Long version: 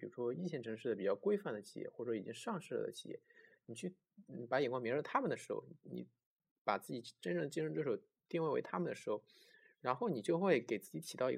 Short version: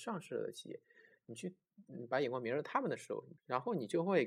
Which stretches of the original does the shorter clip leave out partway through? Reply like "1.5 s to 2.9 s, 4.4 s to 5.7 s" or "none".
5.8 s to 9.7 s

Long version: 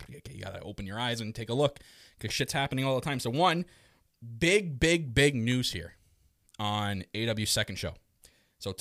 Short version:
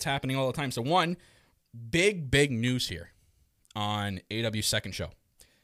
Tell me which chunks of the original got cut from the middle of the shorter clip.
4.8 s to 5.1 s

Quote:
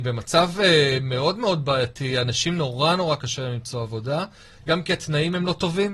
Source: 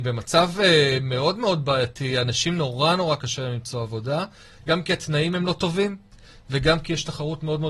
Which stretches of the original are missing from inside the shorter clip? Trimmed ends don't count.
none

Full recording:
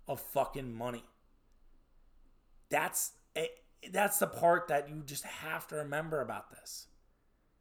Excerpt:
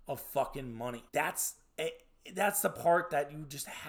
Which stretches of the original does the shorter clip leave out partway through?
1.1 s to 2.7 s

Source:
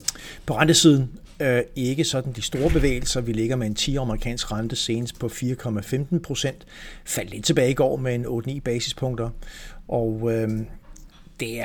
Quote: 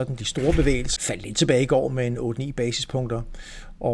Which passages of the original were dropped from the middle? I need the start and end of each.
3.1 s to 7.0 s

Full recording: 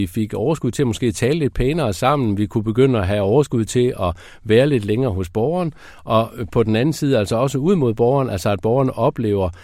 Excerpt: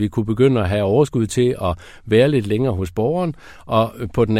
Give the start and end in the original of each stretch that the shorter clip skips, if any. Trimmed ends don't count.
none

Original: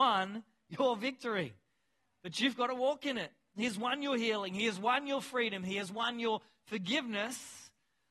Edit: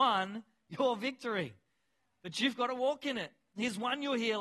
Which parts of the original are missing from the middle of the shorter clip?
none

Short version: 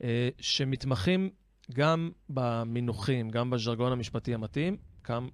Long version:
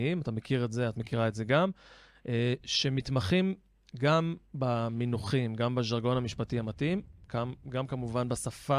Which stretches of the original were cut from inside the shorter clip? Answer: none

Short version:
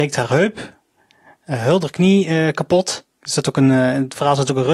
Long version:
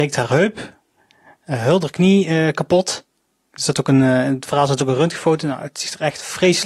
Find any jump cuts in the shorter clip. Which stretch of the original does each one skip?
3.1 s to 3.5 s

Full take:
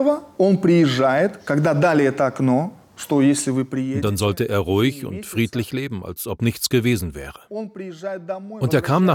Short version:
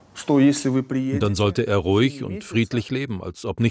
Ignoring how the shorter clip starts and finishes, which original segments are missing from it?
none

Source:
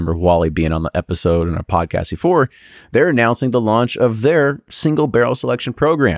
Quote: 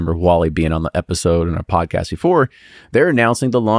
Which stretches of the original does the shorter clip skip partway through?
none

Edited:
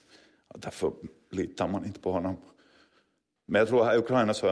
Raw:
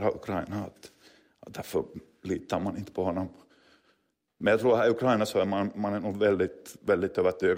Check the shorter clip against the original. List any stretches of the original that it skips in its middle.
none

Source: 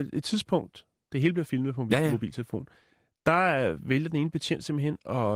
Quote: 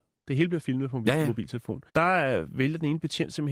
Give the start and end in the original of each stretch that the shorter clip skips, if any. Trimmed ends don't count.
2.7 s to 3.2 s

